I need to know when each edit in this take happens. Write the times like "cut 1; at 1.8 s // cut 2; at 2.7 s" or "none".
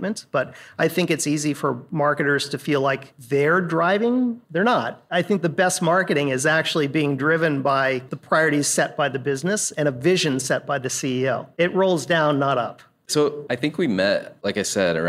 cut 1; at 13.0 s

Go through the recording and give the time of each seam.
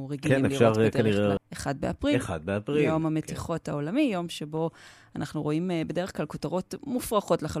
cut 1; at 1.4 s

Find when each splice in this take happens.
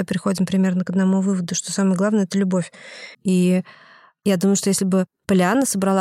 cut 1; at 3.1 s

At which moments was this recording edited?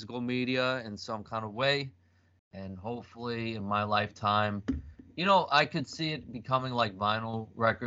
none

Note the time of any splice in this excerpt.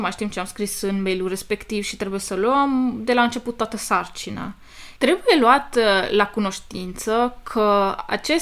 cut 1; at 5.0 s

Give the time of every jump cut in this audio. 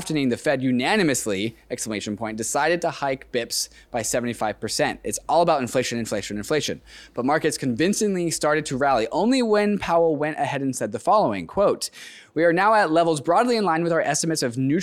none

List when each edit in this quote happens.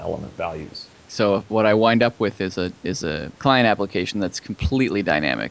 cut 1; at 1.0 s // cut 2; at 3.4 s

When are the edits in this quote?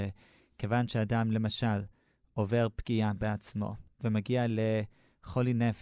none

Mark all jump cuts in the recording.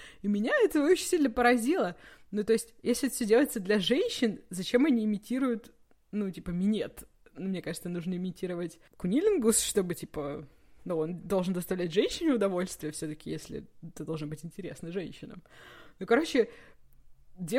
none

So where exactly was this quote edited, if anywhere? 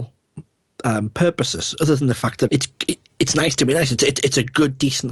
cut 1; at 2.5 s

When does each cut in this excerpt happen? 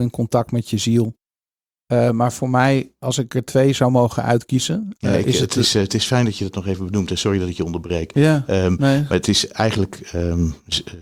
none

